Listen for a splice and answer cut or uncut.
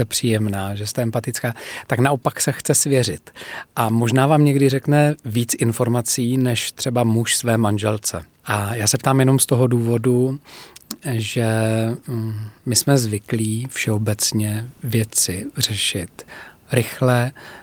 cut